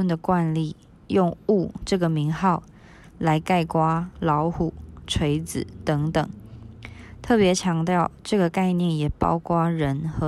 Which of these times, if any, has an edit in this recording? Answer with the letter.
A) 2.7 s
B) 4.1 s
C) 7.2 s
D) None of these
B